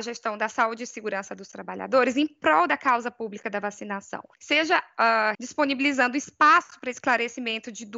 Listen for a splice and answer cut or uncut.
cut